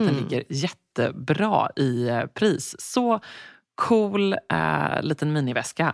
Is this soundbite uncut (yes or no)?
yes